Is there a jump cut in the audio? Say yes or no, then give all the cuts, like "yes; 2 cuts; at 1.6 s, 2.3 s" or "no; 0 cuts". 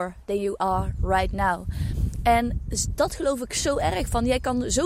no; 0 cuts